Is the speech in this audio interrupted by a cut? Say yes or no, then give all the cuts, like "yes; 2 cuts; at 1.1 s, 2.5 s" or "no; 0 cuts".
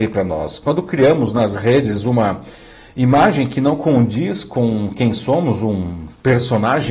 no; 0 cuts